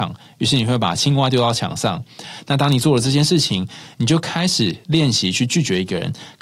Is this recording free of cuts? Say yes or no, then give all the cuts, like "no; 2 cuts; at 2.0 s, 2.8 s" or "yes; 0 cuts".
yes; 0 cuts